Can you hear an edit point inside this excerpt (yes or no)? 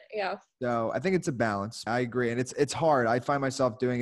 yes